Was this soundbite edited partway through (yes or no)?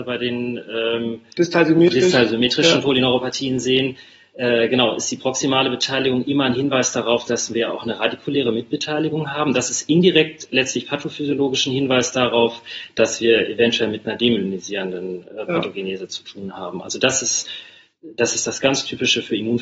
no